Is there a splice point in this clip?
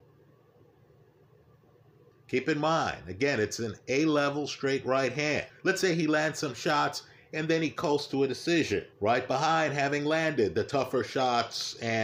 yes; 3 cuts; at 2.1 s, 5.5 s, 8.9 s

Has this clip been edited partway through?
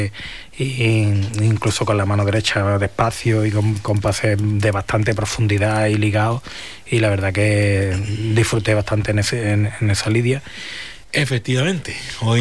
yes; 1 cut; at 11.0 s

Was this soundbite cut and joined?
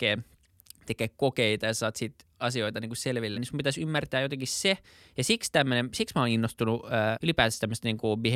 yes; 2 cuts; at 3.3 s, 7.1 s

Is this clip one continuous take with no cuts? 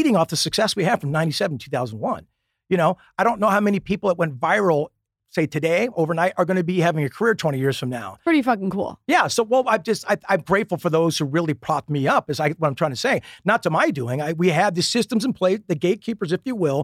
yes; 0 cuts

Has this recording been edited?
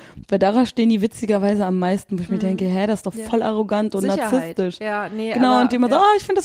no; 0 cuts

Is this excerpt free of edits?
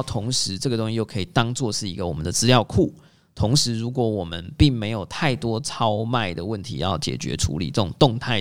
yes; 0 cuts

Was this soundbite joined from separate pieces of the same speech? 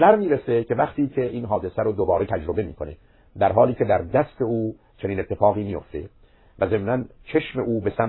no; 0 cuts

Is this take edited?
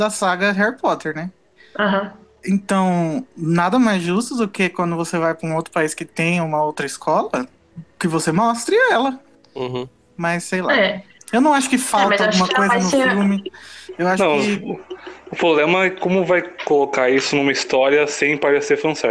no; 0 cuts

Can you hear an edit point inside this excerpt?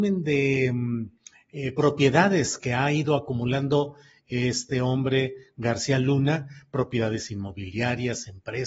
no; 0 cuts

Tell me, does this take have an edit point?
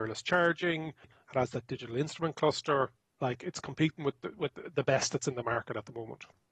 yes; 1 cut; at 1.0 s

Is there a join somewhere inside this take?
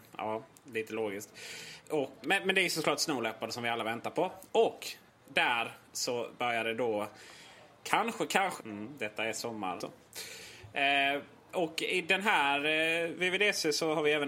yes; 3 cuts; at 2.2 s, 8.6 s, 9.8 s

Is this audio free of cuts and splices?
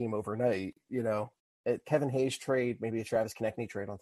yes; 0 cuts

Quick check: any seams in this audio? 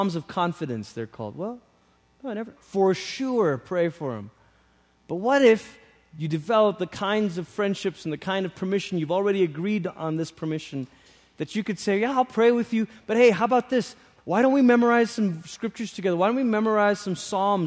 yes; 1 cut; at 2.6 s

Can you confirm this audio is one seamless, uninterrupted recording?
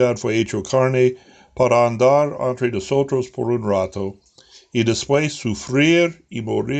yes; 0 cuts

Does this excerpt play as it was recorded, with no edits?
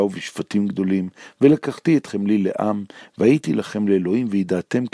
yes; 0 cuts

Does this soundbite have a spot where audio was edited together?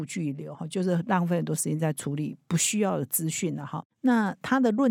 yes; 1 cut; at 3.9 s

